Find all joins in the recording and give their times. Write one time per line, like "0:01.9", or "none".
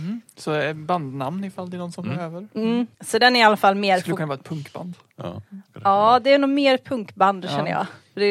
0:02.9